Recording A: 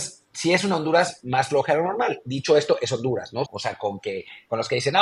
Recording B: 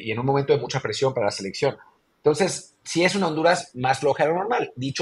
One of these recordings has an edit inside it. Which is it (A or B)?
A